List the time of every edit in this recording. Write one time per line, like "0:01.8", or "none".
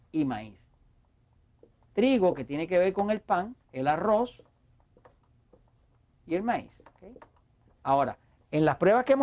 0:03.6